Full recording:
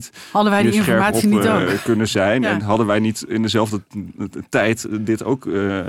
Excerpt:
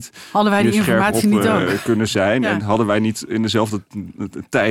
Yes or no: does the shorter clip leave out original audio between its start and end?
no